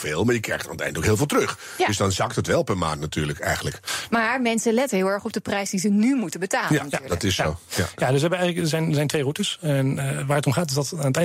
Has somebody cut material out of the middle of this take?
no; 0 cuts

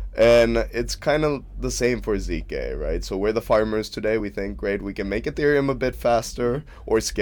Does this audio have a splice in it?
no; 0 cuts

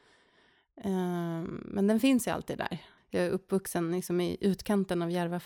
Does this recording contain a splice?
yes; 1 cut; at 3.0 s

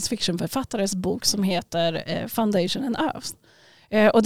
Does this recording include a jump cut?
no; 0 cuts

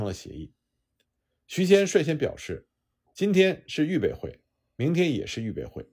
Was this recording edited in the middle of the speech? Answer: no; 0 cuts

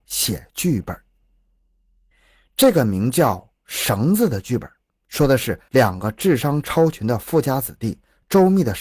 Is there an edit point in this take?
no; 0 cuts

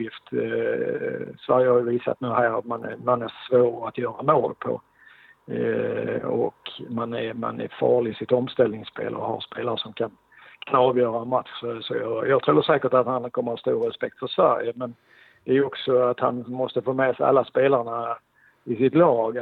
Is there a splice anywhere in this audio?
no; 0 cuts

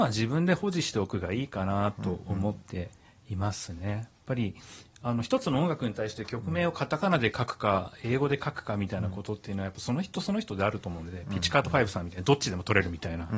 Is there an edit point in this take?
no; 0 cuts

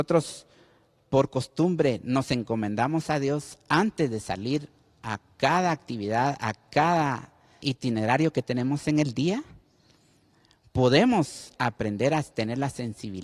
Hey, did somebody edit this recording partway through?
yes; 1 cut; at 7.6 s

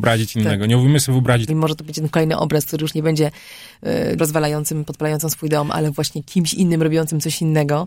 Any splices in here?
yes; 2 cuts; at 1.5 s, 4.2 s

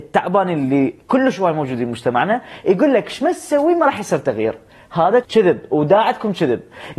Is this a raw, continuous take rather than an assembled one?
no; 1 cut; at 5.2 s

